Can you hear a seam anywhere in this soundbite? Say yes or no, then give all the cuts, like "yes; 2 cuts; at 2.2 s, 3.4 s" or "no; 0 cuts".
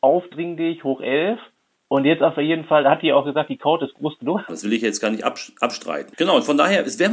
yes; 2 cuts; at 4.5 s, 6.1 s